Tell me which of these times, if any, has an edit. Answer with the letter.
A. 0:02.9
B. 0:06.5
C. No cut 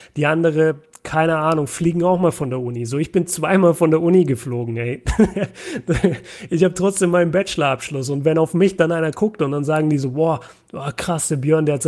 C